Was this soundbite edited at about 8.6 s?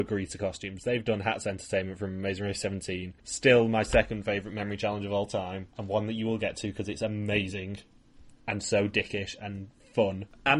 no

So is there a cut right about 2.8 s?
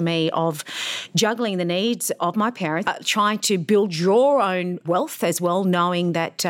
yes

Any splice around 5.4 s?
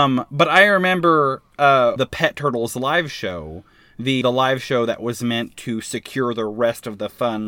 no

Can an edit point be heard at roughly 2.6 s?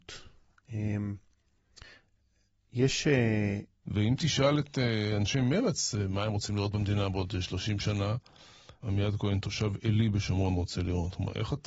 no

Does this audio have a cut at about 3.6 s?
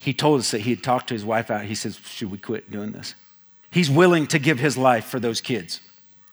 yes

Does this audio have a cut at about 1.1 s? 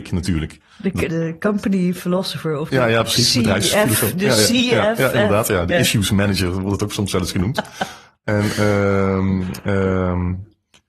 yes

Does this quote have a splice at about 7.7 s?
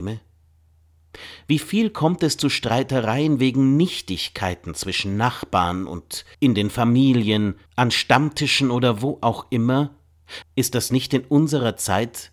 yes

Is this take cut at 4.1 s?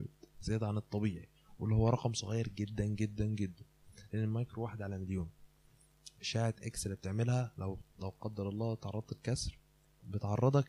no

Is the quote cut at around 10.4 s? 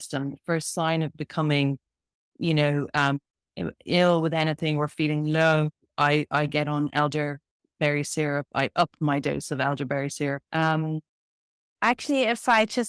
yes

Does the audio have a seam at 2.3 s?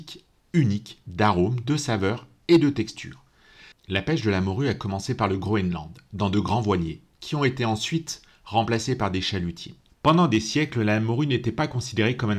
no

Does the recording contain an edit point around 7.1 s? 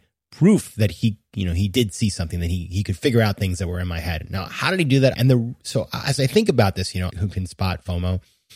yes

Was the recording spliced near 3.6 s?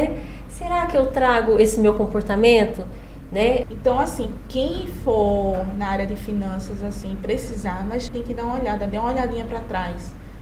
yes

